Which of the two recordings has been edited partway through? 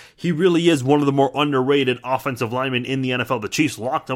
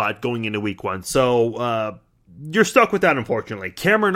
second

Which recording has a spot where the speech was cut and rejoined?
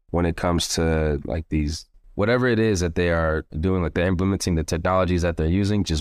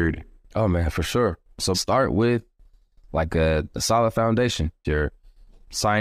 second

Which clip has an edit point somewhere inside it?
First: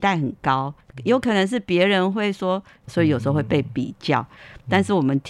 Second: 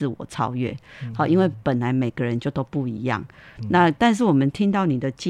first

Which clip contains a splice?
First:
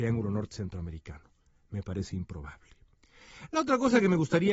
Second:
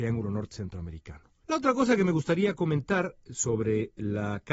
second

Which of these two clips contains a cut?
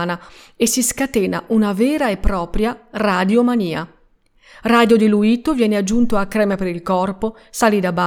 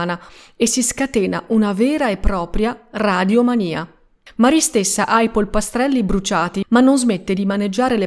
second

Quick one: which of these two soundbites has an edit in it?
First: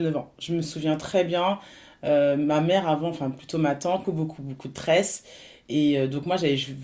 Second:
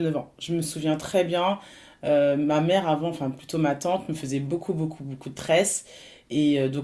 first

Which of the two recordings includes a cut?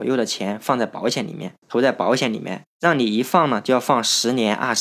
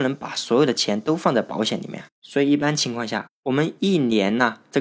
first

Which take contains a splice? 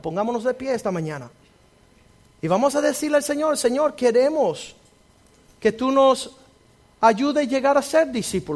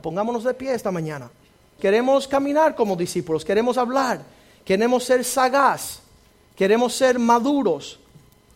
second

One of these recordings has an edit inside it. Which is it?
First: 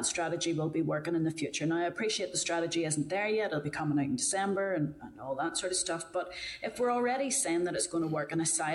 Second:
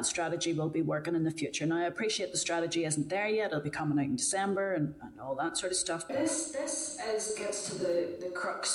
second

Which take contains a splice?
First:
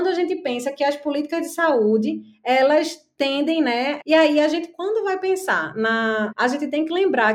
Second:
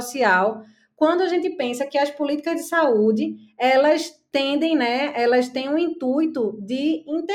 first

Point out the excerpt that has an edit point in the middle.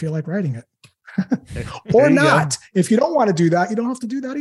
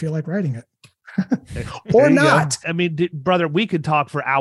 second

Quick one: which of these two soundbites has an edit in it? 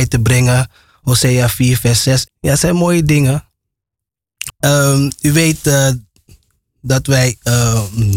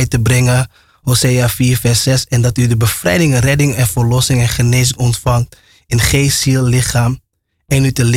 first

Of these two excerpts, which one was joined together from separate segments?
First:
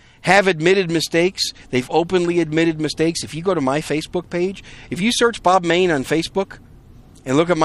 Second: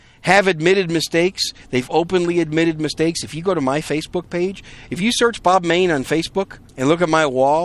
second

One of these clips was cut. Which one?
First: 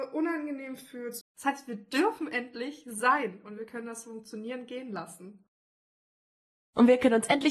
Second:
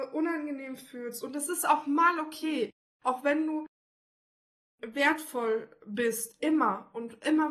first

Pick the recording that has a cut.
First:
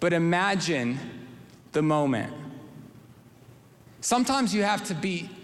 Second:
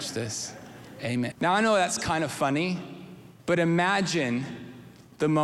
second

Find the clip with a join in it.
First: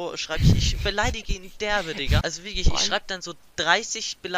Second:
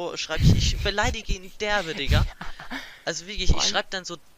first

